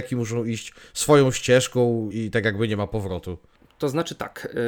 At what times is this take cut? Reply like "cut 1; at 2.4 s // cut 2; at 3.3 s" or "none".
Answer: cut 1; at 2.1 s